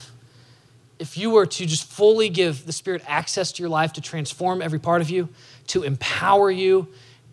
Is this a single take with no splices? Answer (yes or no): yes